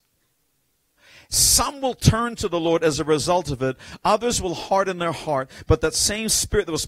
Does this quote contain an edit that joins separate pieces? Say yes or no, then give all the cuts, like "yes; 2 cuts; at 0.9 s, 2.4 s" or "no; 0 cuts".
no; 0 cuts